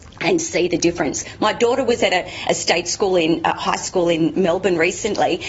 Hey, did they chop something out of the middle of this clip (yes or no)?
no